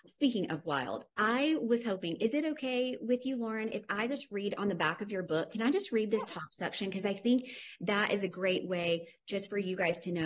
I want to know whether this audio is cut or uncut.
uncut